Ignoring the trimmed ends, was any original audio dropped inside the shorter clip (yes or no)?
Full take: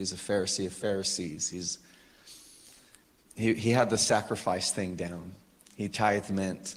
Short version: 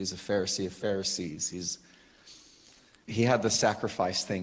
yes